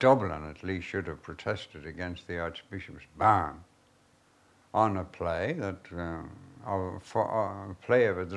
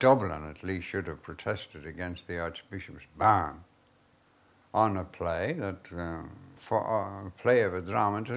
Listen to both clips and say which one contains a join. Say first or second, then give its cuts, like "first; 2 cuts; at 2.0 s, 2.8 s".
second; 1 cut; at 6.6 s